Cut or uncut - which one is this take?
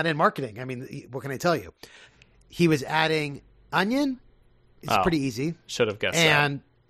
cut